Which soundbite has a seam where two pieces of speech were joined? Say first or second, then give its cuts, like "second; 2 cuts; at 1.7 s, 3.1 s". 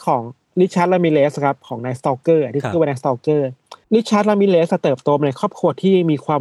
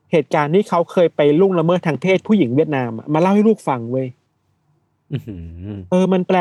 first; 1 cut; at 3.8 s